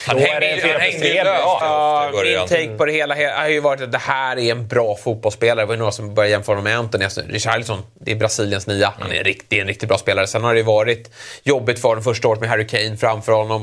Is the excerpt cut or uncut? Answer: cut